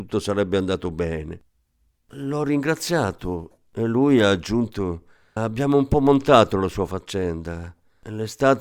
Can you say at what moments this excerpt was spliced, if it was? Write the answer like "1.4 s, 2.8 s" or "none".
5.4 s